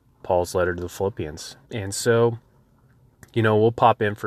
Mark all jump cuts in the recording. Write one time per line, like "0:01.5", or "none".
0:01.6

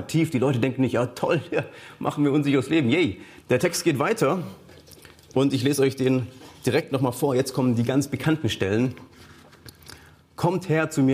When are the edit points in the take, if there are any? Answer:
0:03.4

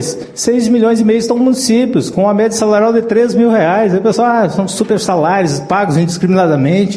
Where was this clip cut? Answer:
none

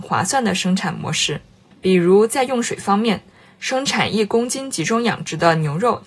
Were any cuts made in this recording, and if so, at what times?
none

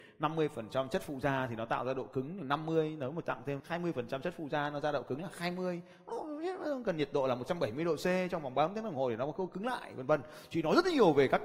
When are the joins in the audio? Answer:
0:03.6

